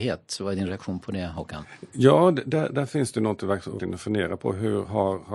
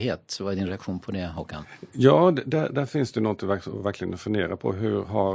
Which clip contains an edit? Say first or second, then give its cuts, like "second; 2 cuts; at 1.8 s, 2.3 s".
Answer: first; 1 cut; at 3.8 s